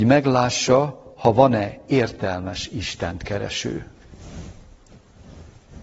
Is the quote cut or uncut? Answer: uncut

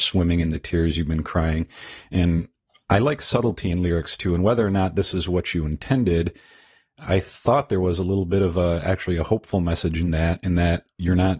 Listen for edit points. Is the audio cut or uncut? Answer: uncut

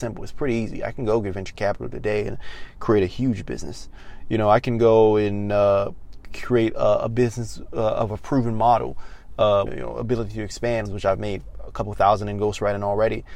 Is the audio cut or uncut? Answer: cut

